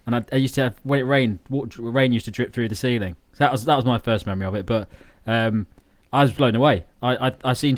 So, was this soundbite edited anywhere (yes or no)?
no